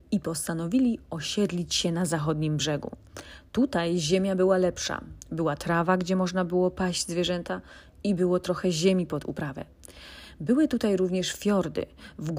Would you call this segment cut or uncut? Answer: uncut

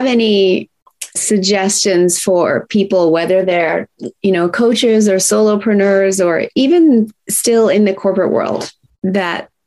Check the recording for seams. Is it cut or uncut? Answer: cut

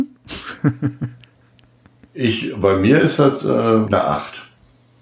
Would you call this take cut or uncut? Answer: cut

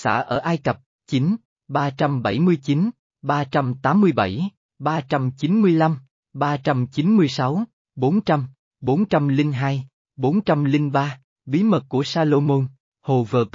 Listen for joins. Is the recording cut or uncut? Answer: uncut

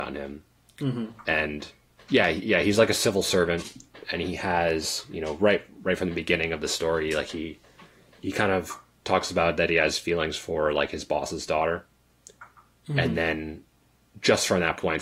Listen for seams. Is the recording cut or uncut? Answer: uncut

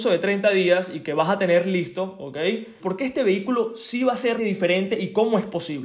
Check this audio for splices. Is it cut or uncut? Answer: cut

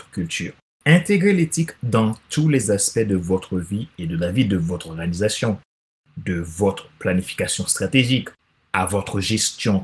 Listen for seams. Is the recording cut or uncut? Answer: uncut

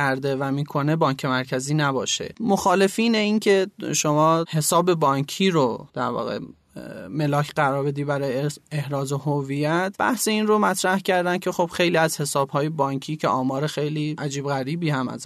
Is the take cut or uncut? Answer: cut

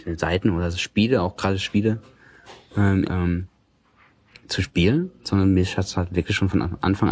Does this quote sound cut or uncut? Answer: cut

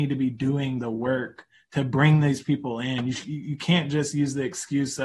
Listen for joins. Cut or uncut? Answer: uncut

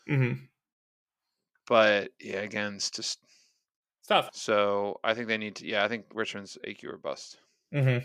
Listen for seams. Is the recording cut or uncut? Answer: cut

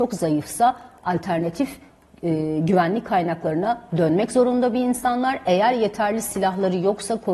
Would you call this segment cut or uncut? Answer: uncut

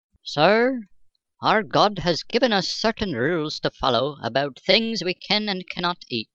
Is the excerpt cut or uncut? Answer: uncut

